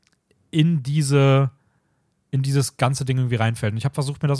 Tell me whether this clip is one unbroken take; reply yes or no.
yes